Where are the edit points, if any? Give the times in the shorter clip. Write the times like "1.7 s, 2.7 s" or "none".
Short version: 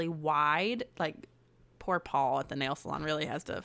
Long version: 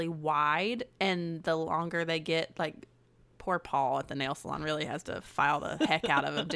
0.9 s